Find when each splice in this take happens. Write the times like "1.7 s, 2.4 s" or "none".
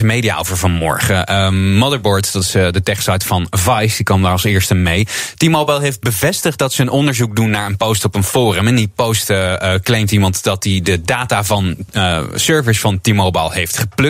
none